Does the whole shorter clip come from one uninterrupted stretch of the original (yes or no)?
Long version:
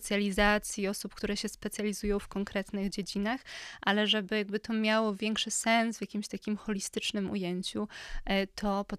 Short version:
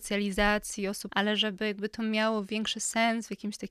no